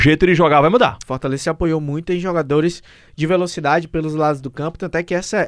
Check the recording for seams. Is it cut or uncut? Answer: cut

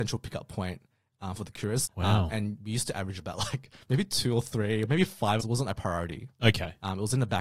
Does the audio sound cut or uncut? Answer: cut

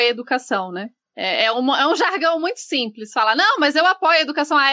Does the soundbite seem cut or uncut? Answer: uncut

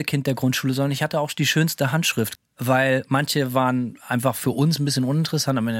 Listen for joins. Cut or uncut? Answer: cut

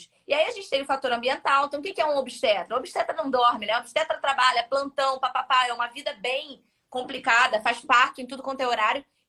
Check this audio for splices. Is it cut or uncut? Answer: uncut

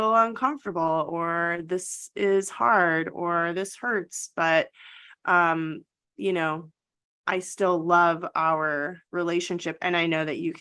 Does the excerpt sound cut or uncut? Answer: cut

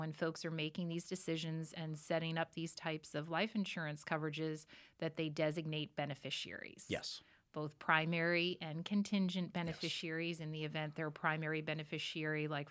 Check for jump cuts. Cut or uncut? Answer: uncut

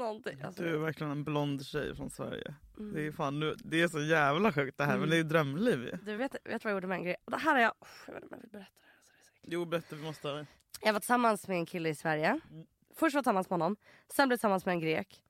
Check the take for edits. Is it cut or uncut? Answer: uncut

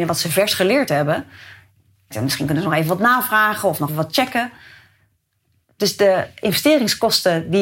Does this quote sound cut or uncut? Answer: cut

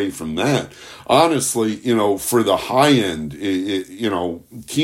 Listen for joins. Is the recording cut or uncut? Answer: uncut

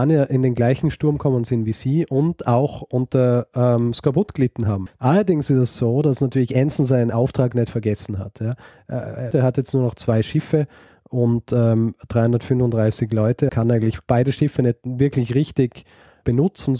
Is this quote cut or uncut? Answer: cut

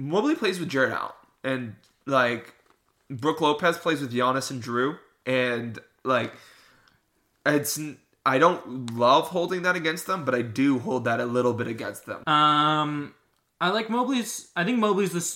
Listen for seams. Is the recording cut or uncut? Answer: cut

